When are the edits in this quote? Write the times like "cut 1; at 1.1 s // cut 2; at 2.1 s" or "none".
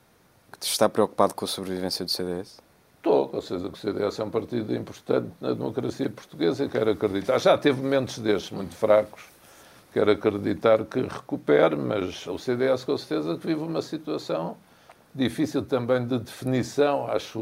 cut 1; at 12.2 s